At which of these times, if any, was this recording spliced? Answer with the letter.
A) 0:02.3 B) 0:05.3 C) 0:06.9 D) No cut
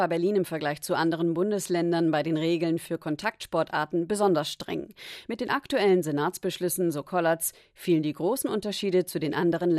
D